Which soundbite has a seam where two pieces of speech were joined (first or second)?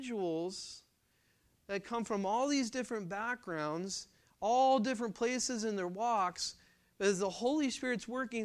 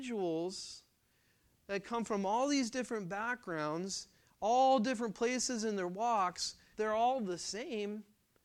second